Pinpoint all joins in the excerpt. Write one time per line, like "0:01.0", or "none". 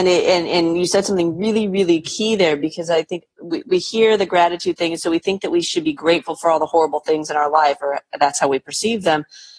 none